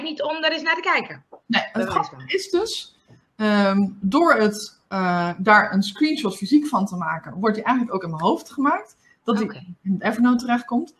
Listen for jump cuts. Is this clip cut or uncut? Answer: uncut